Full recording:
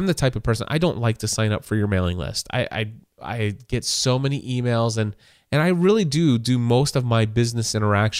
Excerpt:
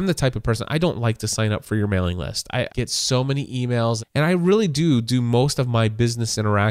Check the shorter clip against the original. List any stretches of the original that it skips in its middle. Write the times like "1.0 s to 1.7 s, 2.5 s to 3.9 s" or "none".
2.7 s to 3.6 s, 4.9 s to 5.4 s